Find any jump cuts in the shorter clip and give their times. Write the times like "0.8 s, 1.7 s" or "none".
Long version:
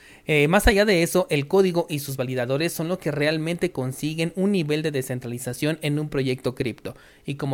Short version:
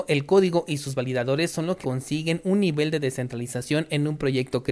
1.8 s